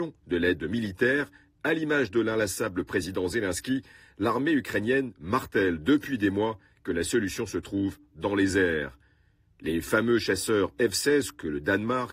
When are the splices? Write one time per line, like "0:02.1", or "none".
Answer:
none